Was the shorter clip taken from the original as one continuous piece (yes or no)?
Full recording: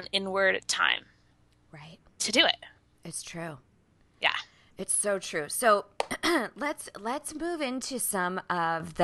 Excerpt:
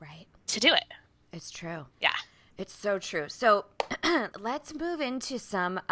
no